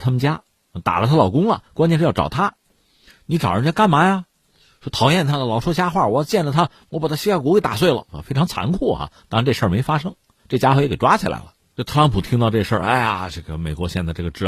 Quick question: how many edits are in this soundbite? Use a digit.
0